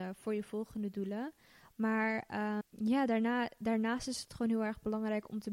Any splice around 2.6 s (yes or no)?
yes